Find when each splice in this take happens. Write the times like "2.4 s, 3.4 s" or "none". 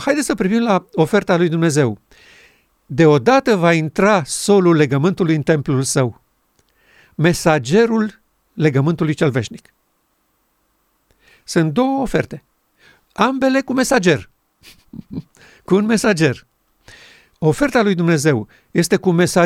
none